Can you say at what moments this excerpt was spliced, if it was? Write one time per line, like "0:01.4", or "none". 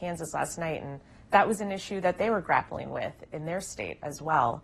none